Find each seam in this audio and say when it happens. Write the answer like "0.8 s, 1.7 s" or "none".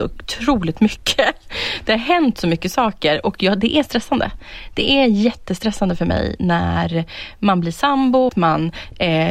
8.3 s